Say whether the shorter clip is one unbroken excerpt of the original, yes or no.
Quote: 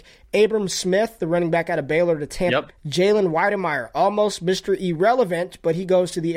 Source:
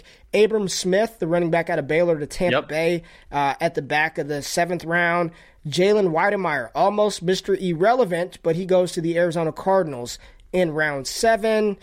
no